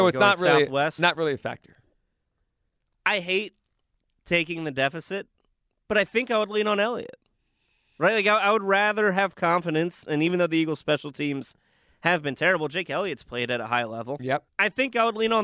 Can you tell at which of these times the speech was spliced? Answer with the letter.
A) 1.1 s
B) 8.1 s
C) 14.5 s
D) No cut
C